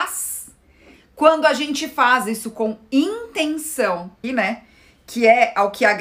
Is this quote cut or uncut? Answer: cut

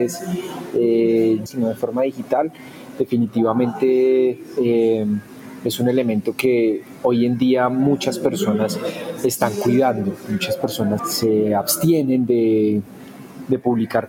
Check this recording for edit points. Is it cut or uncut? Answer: cut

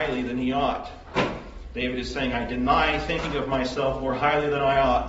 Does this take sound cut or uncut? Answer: uncut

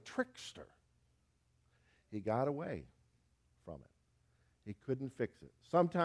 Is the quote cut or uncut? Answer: uncut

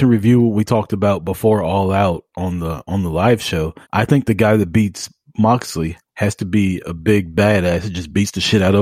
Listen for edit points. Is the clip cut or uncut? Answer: cut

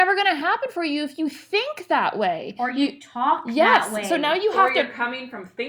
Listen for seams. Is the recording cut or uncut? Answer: uncut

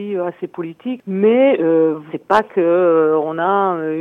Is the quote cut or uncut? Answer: cut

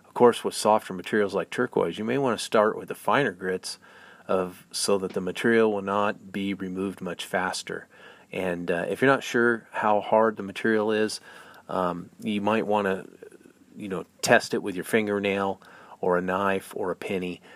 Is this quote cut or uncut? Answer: uncut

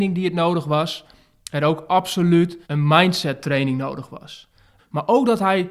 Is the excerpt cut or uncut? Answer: cut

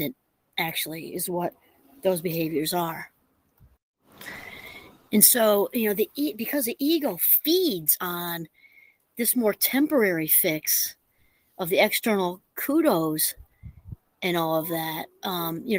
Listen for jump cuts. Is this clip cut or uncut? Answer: uncut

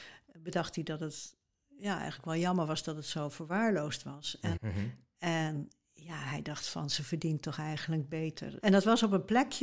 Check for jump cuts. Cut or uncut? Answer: cut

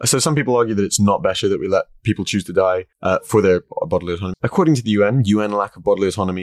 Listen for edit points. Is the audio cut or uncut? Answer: cut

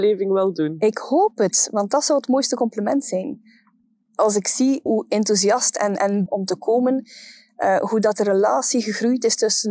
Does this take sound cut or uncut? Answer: cut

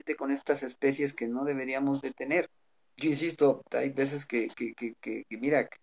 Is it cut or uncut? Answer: uncut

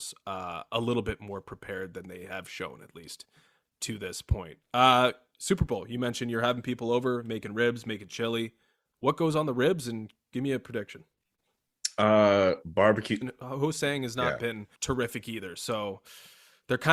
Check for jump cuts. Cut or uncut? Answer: cut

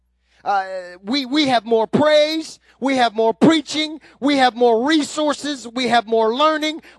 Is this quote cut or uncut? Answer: uncut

